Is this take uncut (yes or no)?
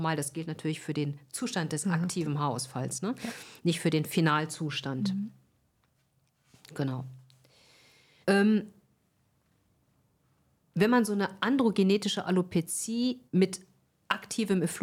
no